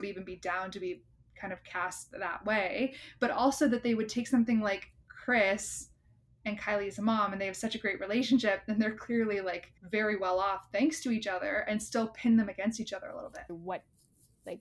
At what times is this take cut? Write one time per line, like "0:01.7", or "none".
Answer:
0:09.8
0:13.5